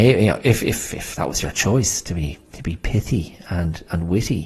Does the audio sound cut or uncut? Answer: uncut